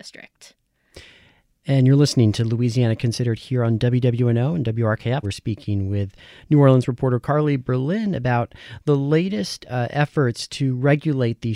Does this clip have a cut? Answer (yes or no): yes